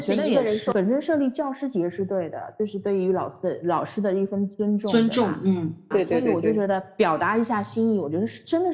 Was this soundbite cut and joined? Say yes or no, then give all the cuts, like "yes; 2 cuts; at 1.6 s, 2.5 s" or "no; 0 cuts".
yes; 1 cut; at 5.9 s